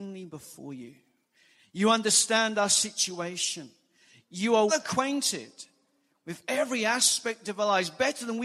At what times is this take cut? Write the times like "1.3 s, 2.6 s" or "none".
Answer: 4.7 s